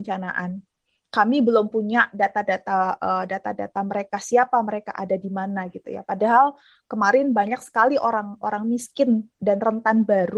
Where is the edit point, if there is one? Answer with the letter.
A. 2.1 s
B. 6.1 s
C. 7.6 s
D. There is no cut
D